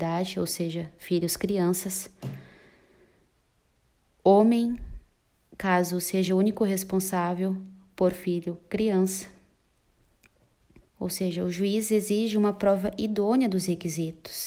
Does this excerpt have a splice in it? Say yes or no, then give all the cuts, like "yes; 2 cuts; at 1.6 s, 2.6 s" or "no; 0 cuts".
yes; 1 cut; at 10.8 s